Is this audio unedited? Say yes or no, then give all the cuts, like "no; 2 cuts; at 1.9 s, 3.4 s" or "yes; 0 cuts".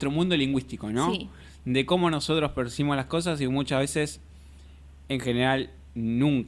yes; 0 cuts